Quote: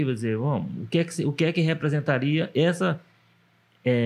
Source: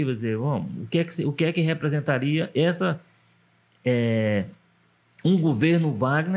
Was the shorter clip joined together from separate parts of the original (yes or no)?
no